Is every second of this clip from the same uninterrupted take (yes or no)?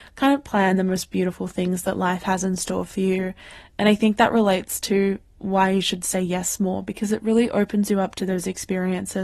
yes